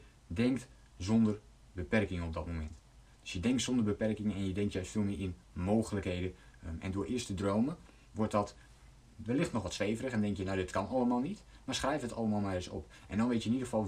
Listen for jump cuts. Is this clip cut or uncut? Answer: uncut